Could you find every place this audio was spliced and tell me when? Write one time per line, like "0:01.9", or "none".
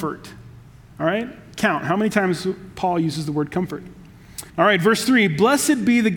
0:04.5